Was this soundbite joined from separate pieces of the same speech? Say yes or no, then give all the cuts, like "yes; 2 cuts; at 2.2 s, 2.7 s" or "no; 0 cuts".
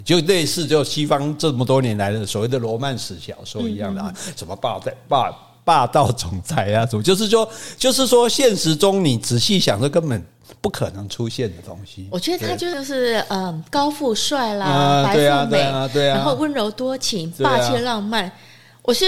no; 0 cuts